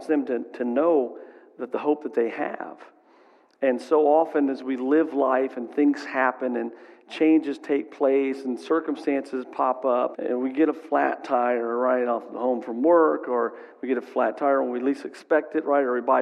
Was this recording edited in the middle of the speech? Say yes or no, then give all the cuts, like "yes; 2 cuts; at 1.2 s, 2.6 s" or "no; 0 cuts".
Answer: yes; 1 cut; at 10.1 s